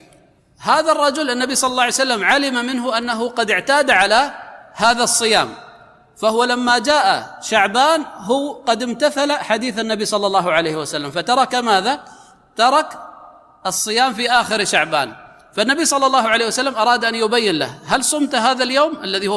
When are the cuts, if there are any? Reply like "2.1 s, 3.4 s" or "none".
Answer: none